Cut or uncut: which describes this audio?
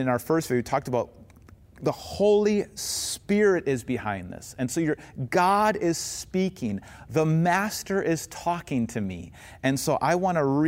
uncut